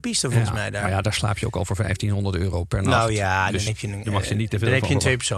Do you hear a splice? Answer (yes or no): no